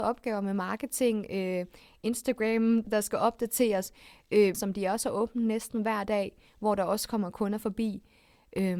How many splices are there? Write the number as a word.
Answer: two